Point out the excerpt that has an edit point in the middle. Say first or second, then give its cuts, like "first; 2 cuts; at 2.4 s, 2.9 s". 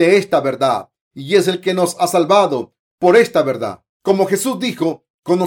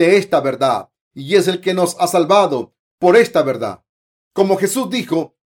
first; 1 cut; at 3.9 s